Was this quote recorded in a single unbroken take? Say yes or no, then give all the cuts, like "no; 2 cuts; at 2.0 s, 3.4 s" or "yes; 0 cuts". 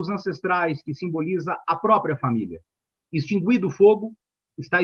yes; 0 cuts